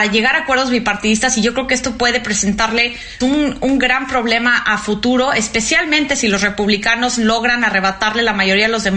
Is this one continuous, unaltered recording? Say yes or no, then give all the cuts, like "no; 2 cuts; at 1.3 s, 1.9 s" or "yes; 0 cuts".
no; 1 cut; at 3.2 s